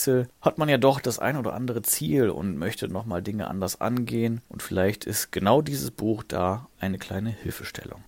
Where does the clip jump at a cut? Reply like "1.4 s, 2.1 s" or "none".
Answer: none